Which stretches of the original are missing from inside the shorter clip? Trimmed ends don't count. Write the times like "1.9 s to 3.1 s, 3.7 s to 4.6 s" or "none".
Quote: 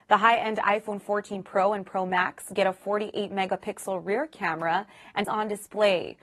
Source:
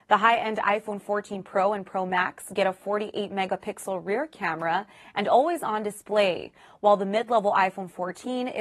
5.2 s to 5.6 s

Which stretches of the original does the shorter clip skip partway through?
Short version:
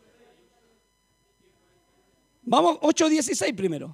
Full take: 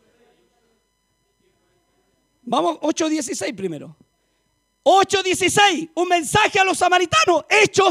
none

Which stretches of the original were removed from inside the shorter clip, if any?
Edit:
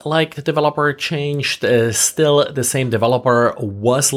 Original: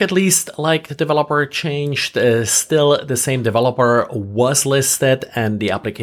none

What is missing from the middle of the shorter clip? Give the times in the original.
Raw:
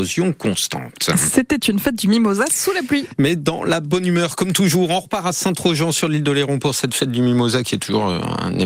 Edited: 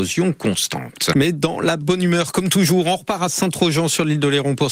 1.1 s to 3.2 s

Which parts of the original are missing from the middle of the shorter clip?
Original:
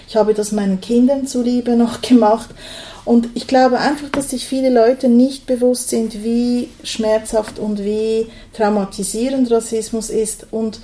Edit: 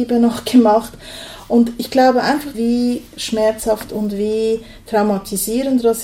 4.1 s to 6.2 s

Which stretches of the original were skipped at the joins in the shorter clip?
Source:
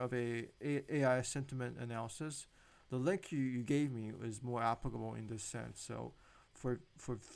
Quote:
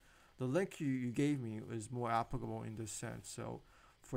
none

